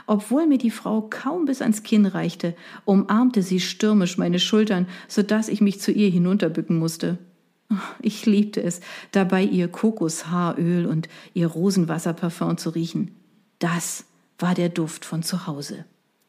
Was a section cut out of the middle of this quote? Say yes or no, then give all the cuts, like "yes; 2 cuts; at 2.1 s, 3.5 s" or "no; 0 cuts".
no; 0 cuts